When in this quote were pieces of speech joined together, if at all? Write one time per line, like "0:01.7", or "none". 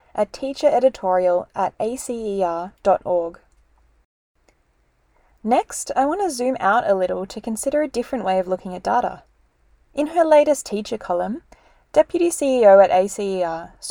none